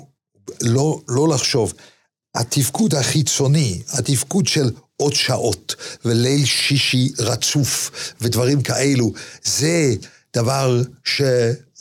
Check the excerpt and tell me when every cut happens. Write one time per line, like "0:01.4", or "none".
none